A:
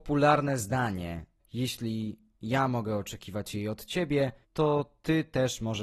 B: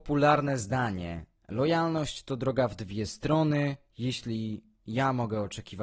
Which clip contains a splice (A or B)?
A